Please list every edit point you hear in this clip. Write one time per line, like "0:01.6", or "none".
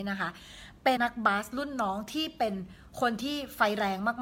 0:01.0